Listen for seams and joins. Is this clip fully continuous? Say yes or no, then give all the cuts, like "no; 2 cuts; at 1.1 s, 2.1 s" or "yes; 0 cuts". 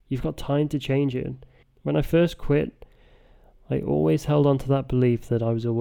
no; 1 cut; at 1.6 s